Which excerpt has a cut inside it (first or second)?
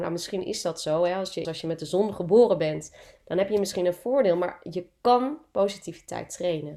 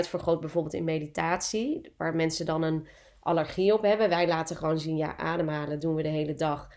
first